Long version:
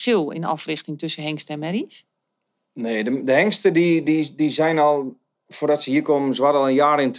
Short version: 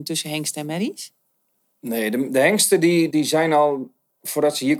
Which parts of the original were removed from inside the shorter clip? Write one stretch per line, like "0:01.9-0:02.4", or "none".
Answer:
0:04.0-0:04.4